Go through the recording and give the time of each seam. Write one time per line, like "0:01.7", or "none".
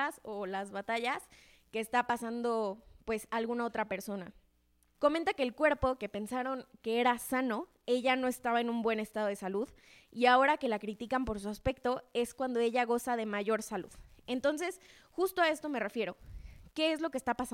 0:04.9